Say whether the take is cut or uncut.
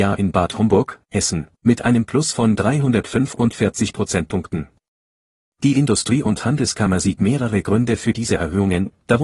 uncut